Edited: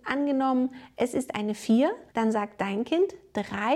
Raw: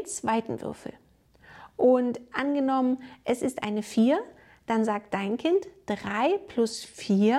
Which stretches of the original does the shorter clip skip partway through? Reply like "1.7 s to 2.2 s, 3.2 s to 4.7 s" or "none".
4.4 s to 4.6 s